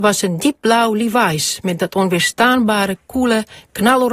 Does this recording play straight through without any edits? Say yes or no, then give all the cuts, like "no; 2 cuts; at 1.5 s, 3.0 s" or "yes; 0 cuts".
yes; 0 cuts